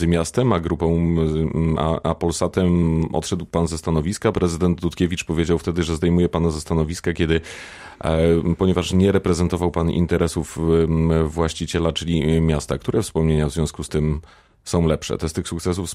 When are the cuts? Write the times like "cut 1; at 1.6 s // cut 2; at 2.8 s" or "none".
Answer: cut 1; at 4.3 s